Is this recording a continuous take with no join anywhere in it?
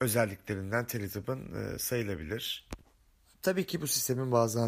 yes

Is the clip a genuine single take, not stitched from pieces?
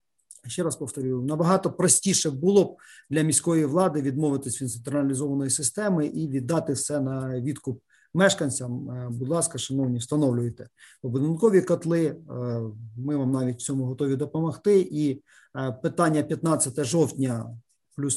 yes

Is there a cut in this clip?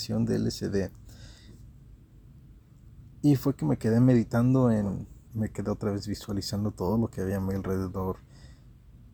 yes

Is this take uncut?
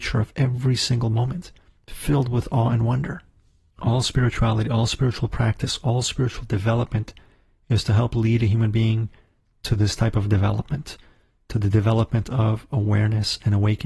yes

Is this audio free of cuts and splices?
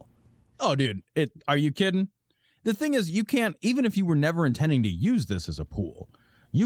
yes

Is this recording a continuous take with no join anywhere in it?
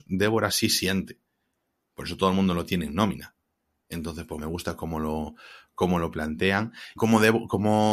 no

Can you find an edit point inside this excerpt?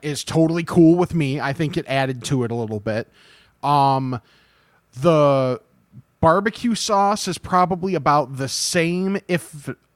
no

